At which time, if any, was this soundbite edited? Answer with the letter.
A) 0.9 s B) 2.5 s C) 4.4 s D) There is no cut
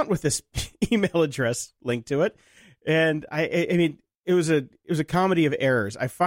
D